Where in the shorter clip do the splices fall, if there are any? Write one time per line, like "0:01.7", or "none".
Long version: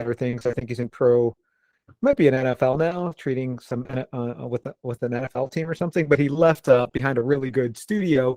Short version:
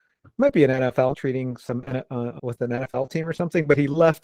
0:01.1
0:02.4

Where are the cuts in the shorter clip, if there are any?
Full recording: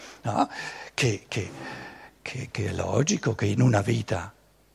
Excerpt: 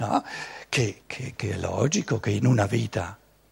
0:01.0

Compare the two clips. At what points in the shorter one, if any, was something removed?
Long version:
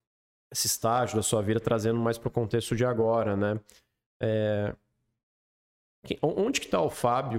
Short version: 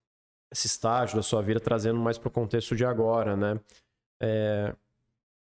none

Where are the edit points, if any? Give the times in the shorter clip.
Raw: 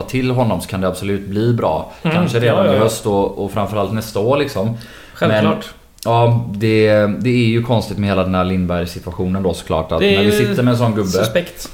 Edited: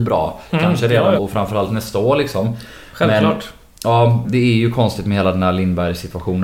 0:01.2
0:04.2

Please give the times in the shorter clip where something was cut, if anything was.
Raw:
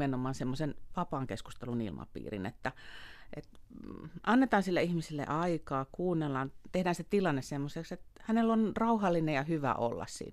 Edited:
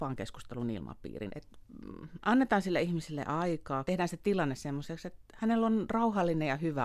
0:01.3
0:03.9

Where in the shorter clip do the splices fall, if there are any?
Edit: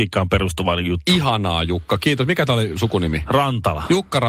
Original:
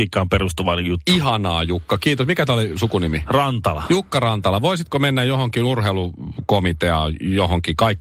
none

